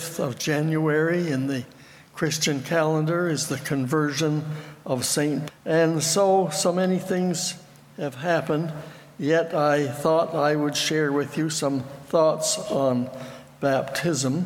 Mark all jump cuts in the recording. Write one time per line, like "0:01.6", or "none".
0:05.5